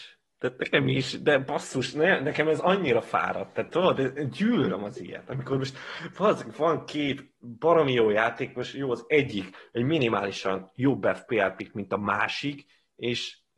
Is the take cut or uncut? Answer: uncut